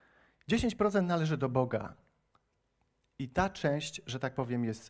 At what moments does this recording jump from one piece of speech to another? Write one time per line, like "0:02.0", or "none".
none